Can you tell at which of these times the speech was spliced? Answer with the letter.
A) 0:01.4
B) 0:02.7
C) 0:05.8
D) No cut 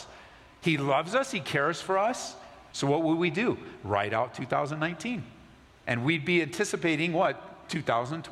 B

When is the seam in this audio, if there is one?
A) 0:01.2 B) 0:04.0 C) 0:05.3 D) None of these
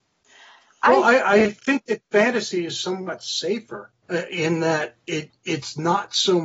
B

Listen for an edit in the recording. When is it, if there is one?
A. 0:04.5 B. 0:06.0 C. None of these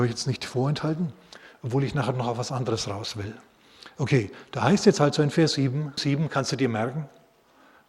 B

